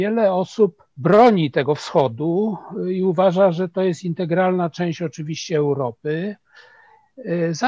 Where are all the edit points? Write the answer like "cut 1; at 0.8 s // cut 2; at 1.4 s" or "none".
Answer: cut 1; at 0.9 s